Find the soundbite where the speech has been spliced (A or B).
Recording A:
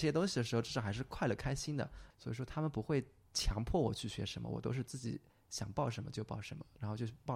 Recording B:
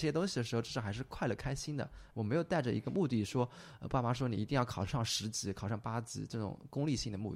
A